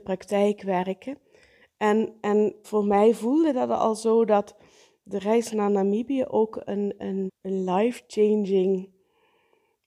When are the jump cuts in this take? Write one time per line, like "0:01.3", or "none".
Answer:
0:02.6
0:07.3